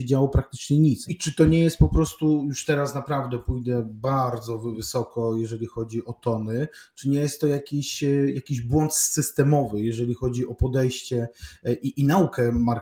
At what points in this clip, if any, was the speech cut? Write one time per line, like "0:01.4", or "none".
0:01.1